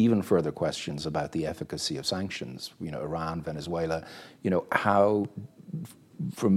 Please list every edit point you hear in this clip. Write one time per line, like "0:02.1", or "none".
none

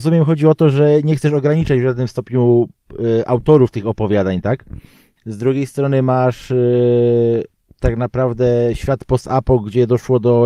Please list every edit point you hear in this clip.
0:05.2

